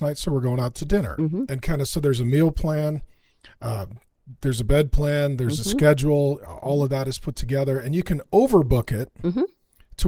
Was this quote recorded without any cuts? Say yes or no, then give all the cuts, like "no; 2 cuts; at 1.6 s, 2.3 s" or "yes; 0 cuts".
yes; 0 cuts